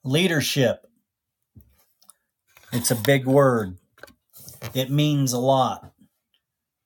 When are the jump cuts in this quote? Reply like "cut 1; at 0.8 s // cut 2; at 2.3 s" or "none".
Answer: none